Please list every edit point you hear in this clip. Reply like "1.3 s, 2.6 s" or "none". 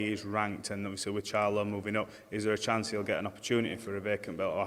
none